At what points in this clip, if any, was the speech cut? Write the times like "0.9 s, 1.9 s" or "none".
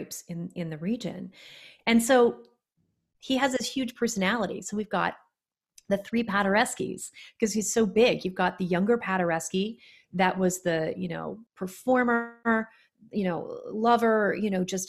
11.5 s

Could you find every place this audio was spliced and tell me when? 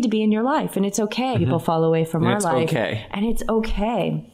1.3 s

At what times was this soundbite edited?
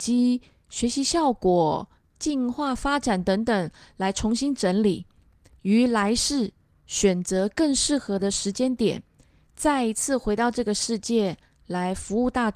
none

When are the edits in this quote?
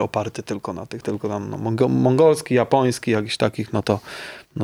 1.0 s

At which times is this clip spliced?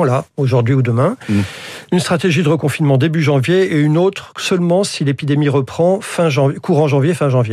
none

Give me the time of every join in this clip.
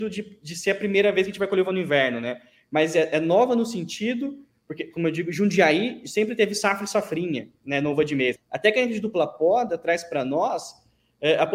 8.4 s

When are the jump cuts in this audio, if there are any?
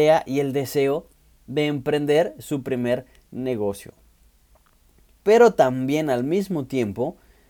none

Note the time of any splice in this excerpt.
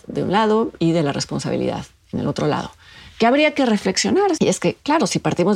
4.4 s

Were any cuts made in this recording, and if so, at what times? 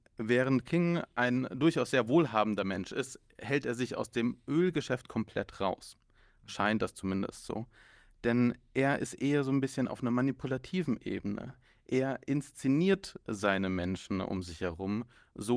none

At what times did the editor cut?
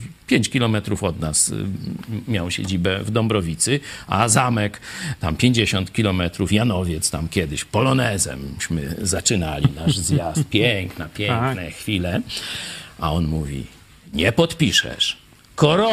none

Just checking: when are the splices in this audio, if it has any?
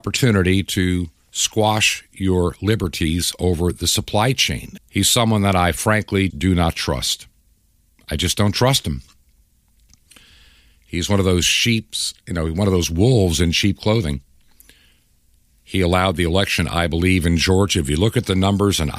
4.8 s, 6.3 s

